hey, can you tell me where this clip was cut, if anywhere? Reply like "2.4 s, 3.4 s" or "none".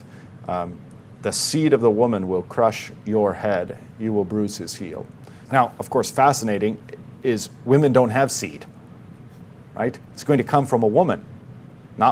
5.5 s, 10.1 s